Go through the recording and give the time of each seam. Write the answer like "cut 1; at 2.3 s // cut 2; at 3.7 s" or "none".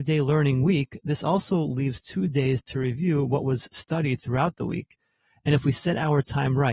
none

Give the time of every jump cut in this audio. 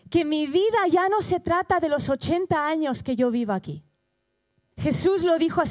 cut 1; at 4.7 s

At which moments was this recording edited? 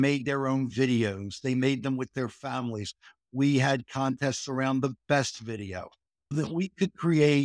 cut 1; at 6.3 s

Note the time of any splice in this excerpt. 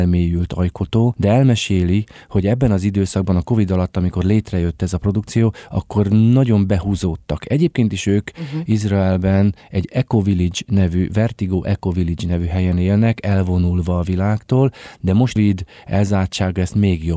cut 1; at 15.4 s

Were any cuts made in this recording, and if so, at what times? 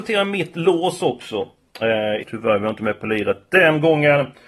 cut 1; at 2.2 s

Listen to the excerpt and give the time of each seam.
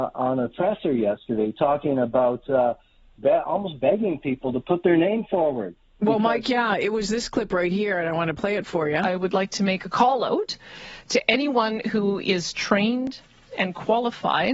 none

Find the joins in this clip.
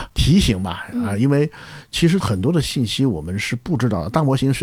cut 1; at 2.2 s

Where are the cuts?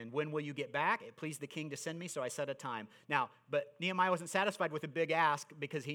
none

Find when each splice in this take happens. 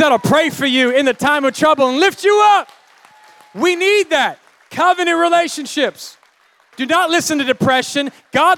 cut 1; at 6.7 s

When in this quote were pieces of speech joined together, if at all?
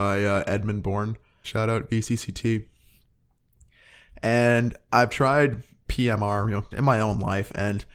cut 1; at 1.4 s // cut 2; at 6.7 s

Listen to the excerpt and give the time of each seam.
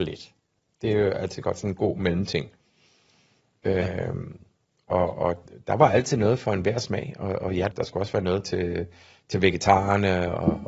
cut 1; at 7.7 s

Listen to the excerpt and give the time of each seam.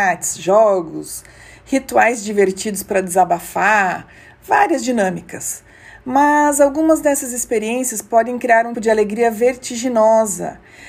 cut 1; at 8.7 s

